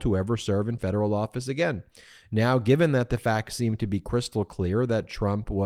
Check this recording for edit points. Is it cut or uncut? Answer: uncut